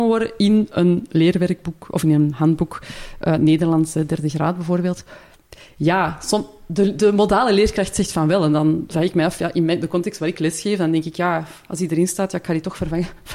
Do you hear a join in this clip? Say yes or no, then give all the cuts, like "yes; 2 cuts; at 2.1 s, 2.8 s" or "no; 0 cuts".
no; 0 cuts